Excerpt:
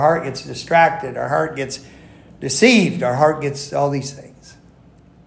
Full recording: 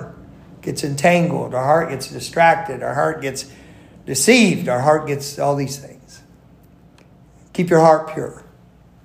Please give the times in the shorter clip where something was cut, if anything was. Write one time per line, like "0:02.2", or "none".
none